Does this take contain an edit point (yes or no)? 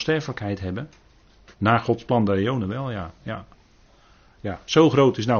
yes